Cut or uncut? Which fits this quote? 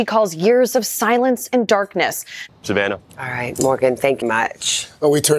cut